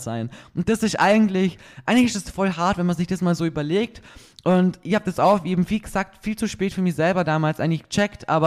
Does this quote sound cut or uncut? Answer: uncut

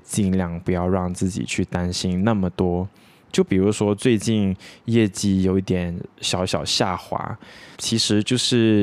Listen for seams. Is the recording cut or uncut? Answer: cut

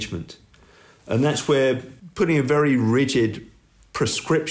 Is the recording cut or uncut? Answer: uncut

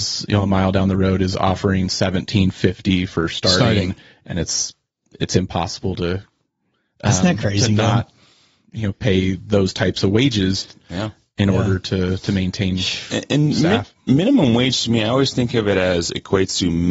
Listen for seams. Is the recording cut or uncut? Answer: uncut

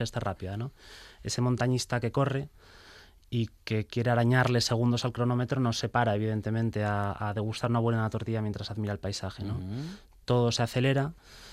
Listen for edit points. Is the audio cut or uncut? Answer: uncut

